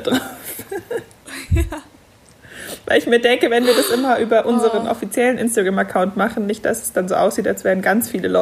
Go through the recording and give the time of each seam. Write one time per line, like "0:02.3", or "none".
none